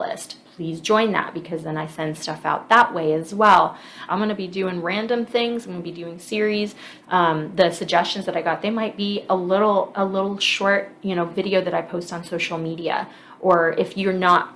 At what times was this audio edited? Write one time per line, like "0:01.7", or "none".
0:04.1
0:07.0